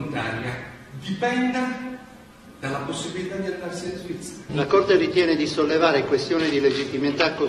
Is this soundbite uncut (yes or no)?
no